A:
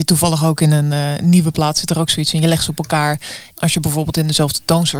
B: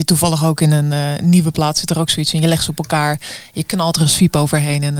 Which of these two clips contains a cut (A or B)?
A